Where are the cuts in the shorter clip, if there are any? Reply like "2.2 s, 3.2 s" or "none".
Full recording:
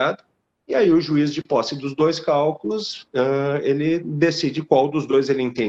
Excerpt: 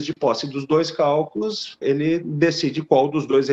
1.8 s

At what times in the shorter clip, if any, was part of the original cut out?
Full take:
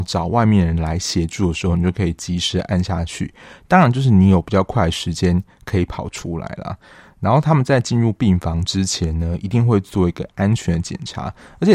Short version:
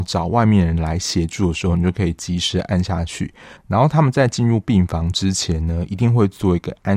3.6 s

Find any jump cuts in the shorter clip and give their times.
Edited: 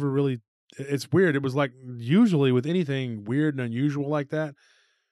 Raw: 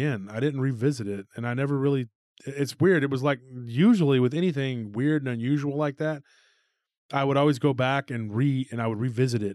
none

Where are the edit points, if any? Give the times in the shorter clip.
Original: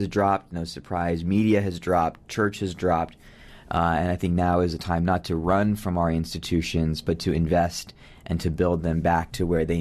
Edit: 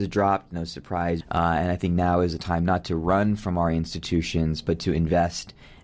1.2 s

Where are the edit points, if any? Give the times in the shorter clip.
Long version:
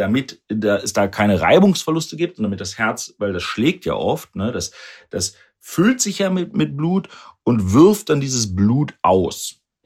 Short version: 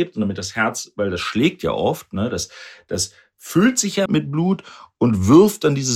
4.1 s

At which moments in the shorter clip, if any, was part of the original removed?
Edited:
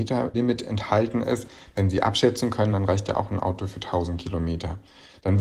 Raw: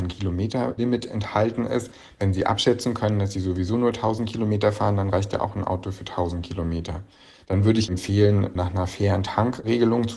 2.7 s

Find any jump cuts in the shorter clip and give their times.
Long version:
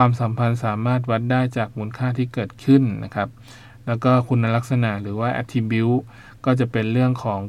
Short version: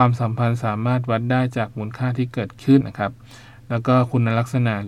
2.8 s

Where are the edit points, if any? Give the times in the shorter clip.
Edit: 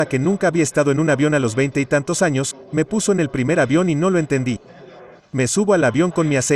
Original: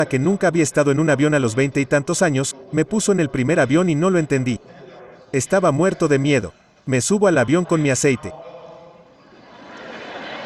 5.2 s

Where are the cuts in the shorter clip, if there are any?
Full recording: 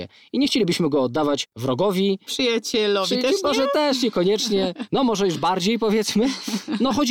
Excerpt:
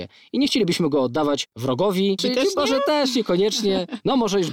2.2 s

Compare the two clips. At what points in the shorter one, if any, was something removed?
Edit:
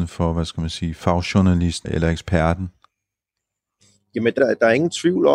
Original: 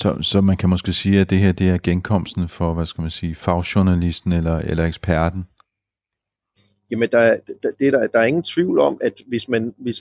1.8 s, 4.4 s

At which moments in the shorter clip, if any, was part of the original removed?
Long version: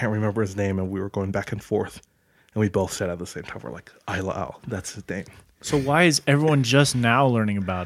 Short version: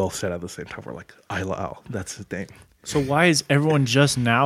none

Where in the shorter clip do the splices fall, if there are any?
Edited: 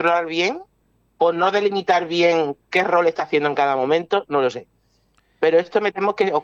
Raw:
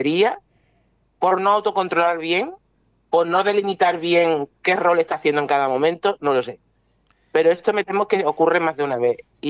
none

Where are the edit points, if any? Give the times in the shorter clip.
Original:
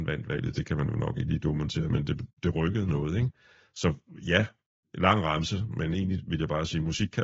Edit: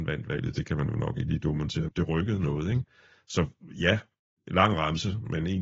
1.9 s

